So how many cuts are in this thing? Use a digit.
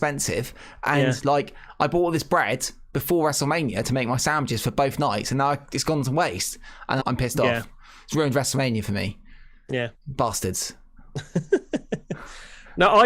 1